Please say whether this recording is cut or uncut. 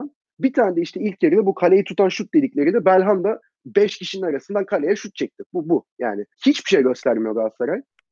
cut